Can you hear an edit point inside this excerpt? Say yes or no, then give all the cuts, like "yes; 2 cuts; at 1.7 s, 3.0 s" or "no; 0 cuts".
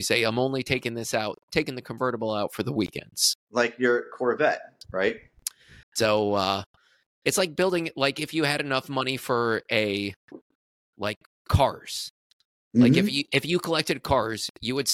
yes; 1 cut; at 5.8 s